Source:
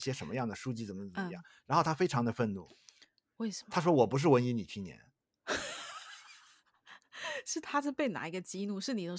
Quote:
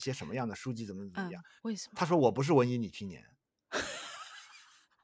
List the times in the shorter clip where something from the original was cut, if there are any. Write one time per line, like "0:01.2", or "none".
0:01.6